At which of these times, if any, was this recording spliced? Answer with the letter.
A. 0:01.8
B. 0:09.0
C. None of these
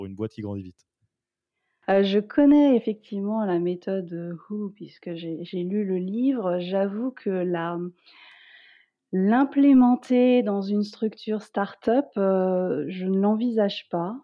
A